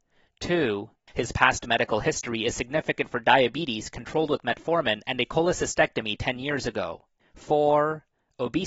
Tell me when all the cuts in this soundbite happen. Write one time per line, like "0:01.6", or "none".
0:01.1
0:07.2